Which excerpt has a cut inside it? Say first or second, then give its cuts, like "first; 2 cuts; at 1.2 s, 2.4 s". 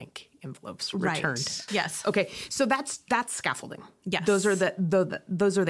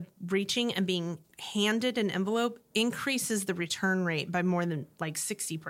first; 2 cuts; at 1.7 s, 3.1 s